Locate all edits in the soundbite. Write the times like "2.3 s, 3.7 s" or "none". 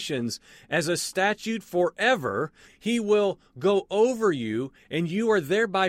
2.6 s